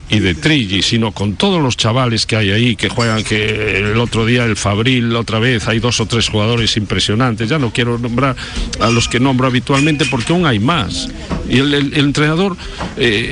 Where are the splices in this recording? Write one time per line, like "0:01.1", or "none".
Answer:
none